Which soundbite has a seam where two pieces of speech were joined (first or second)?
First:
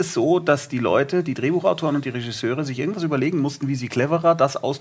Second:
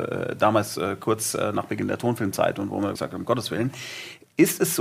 second